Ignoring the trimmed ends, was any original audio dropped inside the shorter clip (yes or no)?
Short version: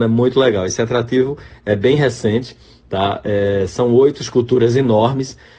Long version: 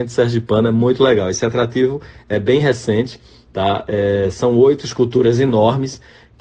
no